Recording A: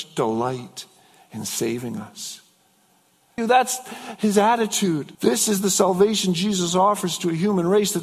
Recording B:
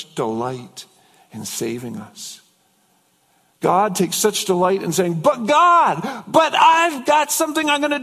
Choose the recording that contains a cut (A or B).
A